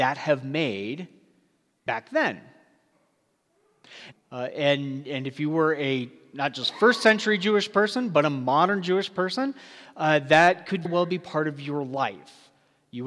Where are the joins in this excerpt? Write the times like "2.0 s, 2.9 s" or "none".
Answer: 4.1 s, 10.8 s